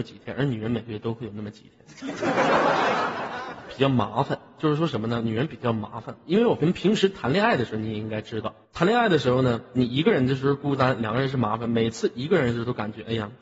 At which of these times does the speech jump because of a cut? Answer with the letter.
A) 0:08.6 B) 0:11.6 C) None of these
A